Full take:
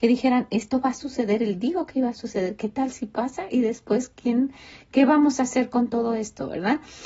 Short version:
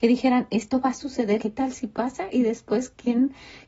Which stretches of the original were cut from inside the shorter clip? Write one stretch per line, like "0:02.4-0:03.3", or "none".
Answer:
0:01.4-0:02.6